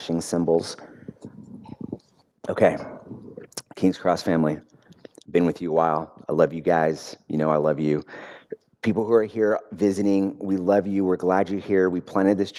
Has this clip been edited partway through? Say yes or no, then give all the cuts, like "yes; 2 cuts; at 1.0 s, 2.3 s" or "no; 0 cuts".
no; 0 cuts